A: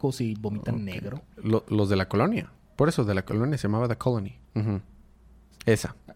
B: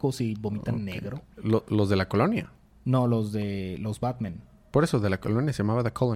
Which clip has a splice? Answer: A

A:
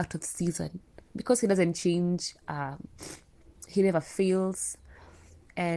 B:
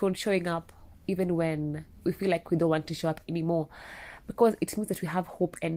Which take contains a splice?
A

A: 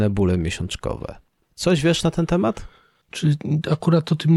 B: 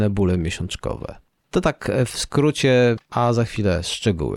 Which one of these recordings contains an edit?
A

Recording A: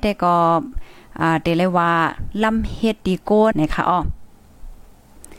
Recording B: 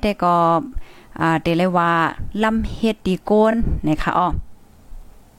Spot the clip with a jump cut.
A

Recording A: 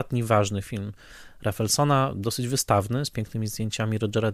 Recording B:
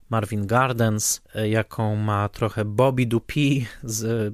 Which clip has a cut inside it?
B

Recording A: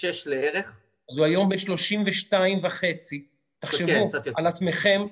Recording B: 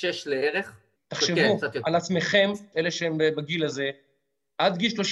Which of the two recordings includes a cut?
B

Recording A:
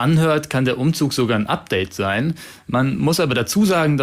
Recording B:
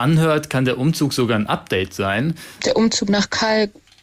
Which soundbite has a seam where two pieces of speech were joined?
B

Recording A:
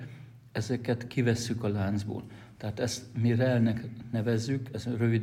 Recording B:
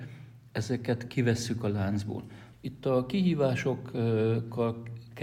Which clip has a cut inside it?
B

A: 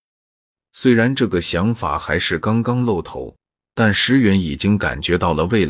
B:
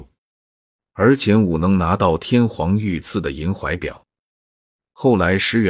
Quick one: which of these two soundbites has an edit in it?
A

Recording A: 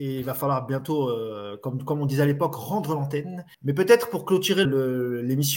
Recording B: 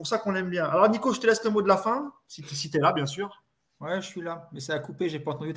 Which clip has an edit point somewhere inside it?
A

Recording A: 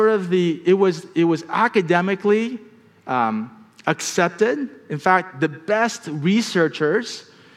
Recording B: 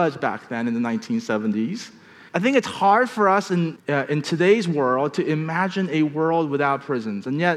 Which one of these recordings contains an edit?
B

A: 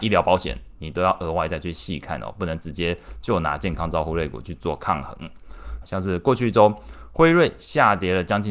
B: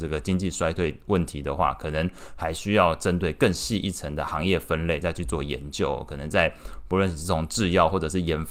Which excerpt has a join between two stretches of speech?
A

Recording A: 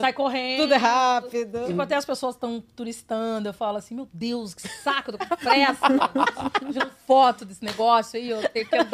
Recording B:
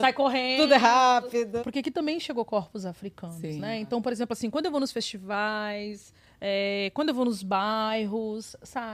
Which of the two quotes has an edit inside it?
B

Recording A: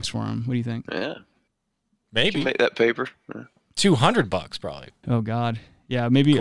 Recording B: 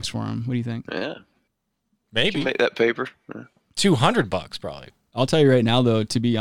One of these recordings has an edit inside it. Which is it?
A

